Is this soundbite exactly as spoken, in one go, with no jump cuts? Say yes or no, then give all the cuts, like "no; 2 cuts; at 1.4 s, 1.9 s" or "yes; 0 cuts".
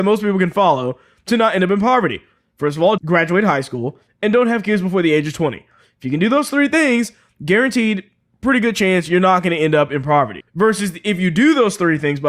no; 2 cuts; at 3.0 s, 10.4 s